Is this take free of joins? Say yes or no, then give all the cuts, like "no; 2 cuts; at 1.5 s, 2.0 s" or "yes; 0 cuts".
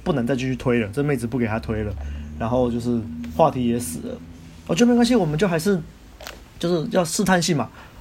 yes; 0 cuts